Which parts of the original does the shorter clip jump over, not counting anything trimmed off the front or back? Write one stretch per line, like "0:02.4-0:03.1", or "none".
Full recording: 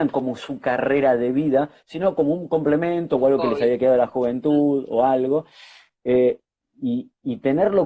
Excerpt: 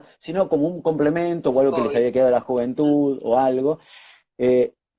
none